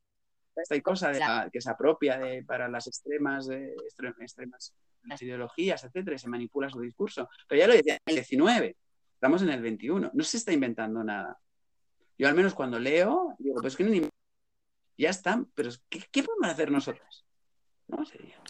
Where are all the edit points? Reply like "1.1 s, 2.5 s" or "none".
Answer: none